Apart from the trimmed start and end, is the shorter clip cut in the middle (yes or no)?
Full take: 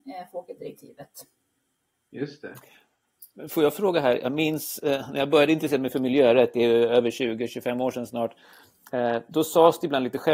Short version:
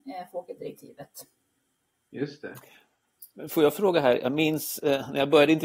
no